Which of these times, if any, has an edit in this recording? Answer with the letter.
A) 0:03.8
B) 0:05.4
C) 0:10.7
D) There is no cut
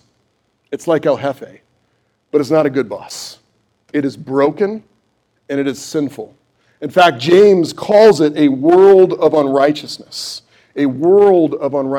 B